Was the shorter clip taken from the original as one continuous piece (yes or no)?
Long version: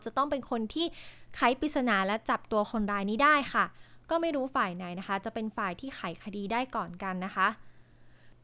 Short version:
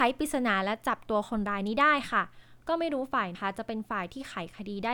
no